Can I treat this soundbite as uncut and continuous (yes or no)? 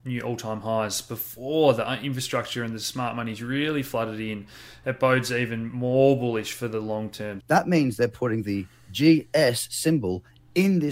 no